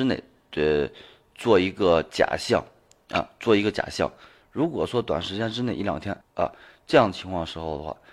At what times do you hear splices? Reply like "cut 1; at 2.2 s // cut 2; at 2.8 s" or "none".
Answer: cut 1; at 4.4 s // cut 2; at 6.2 s